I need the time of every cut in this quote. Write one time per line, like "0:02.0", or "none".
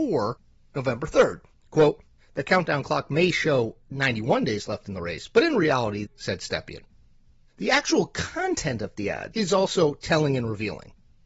0:06.1
0:09.3

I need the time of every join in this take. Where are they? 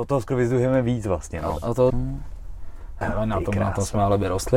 0:01.9
0:03.0

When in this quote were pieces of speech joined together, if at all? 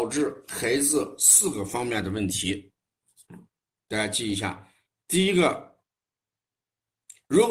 none

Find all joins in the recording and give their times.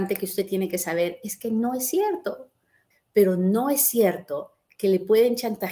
0:02.9

